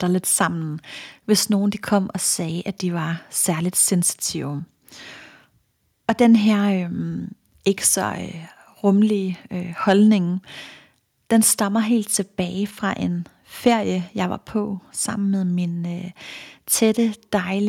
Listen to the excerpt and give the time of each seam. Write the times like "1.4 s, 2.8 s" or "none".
none